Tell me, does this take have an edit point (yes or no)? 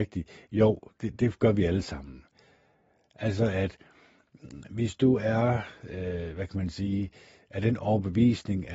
no